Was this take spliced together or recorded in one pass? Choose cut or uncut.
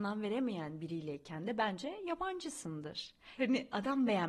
cut